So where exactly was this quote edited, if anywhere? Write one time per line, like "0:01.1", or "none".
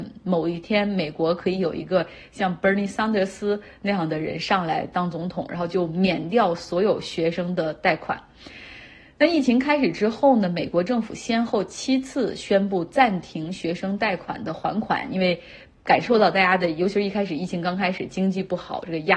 none